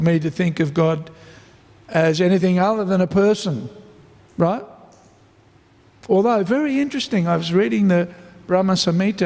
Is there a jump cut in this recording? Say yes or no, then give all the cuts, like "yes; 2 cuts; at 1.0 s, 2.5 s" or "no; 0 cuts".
no; 0 cuts